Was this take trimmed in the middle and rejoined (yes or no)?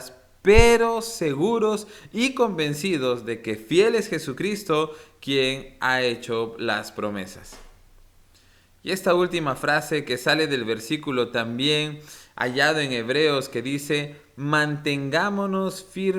no